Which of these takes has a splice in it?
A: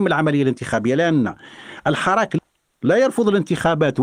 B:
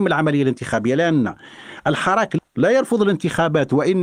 B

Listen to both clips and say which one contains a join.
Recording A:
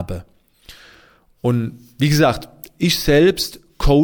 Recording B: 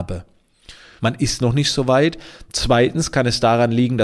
B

